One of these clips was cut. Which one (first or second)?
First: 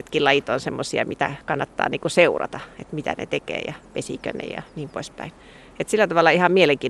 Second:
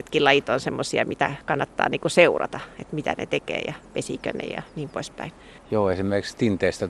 second